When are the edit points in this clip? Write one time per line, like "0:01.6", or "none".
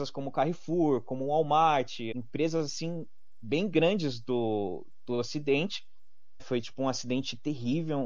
0:02.1
0:06.4